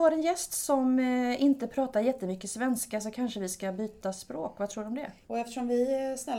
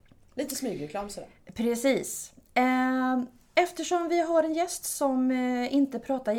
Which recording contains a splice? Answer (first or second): first